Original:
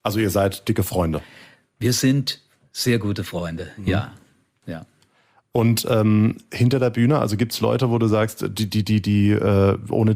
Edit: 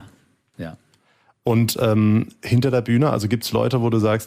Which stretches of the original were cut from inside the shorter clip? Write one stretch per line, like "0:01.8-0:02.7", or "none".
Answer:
none

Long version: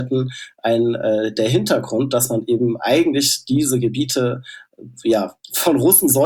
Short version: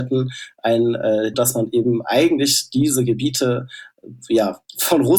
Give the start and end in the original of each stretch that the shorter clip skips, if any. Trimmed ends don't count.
0:01.3-0:02.1

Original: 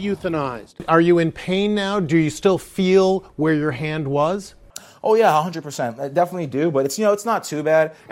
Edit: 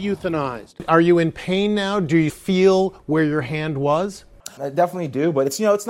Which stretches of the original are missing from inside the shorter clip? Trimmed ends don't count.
0:02.3-0:02.6
0:04.9-0:06.0

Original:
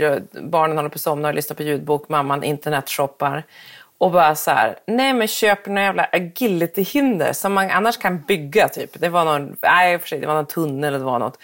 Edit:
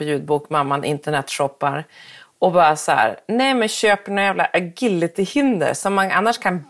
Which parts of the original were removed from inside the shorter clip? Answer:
none

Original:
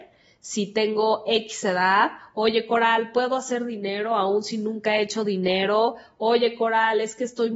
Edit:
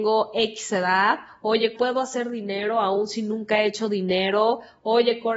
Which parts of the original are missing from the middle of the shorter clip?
0:02.7-0:03.1

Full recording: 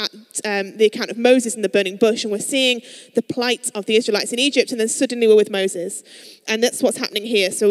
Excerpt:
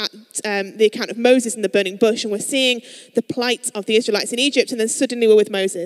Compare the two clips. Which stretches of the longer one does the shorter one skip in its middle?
none

